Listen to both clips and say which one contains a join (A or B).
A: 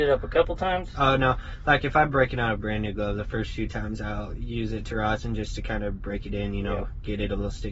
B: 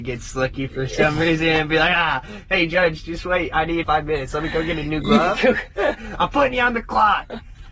B